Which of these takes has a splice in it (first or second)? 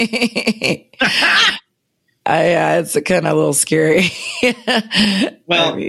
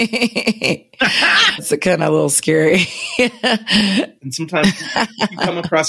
second